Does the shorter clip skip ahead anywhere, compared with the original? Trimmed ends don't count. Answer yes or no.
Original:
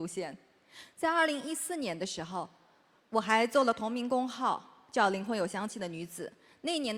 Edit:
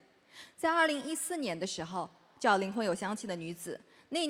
yes